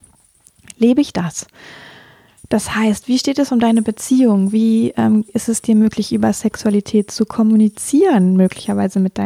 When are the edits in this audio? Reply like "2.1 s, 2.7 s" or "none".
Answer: none